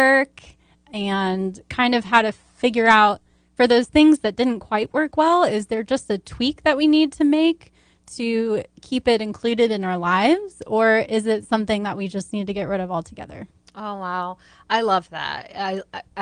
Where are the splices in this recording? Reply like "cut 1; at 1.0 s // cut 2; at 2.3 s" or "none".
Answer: none